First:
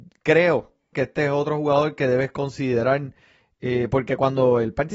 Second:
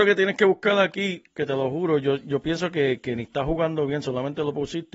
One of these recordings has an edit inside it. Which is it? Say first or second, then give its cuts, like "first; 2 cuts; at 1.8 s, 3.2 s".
first; 1 cut; at 0.9 s